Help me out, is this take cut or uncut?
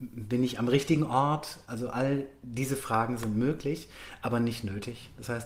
uncut